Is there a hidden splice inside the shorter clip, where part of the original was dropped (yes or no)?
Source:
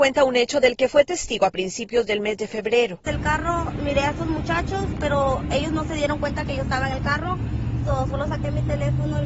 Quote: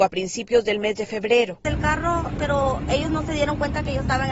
yes